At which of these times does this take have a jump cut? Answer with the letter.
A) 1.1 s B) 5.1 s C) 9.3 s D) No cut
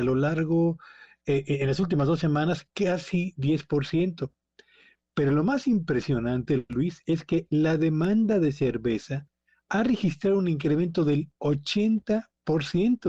D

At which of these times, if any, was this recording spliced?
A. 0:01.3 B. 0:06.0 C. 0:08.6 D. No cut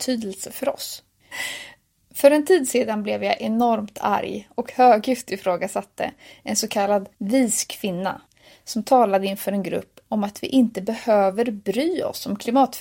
A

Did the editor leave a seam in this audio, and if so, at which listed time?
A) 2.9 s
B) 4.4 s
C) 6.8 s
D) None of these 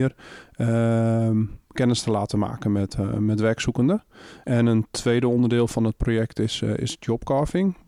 B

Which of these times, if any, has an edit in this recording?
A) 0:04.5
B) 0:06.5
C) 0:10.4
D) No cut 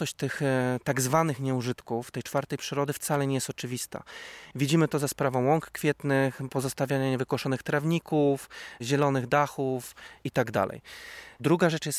A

